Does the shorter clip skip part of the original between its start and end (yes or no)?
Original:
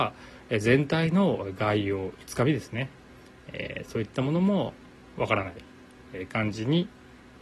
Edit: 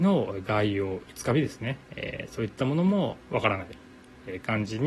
yes